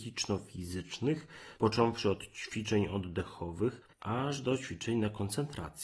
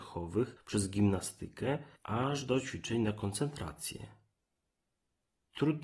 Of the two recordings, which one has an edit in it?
first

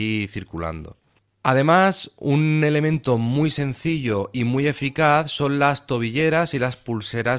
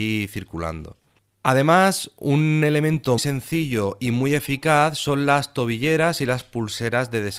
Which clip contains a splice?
second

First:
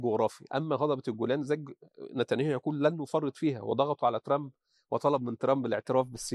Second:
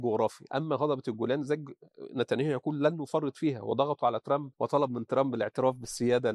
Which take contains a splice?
second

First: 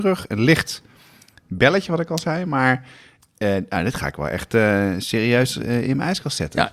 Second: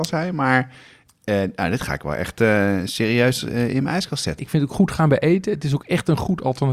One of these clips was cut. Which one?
second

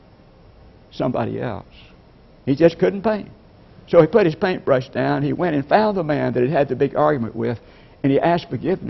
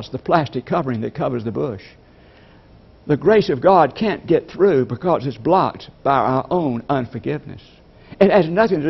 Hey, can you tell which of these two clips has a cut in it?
first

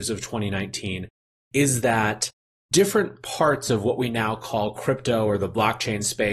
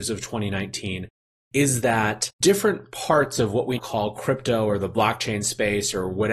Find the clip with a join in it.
second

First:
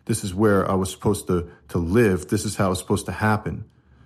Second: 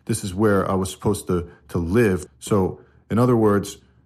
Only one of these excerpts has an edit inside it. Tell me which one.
second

